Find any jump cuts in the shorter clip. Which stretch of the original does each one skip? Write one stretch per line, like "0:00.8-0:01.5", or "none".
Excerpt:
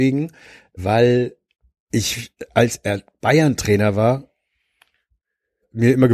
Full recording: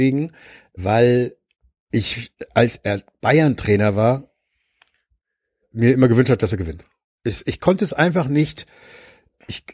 none